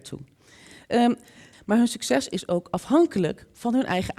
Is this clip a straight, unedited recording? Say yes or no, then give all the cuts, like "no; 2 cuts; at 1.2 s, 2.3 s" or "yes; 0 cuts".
no; 1 cut; at 1.5 s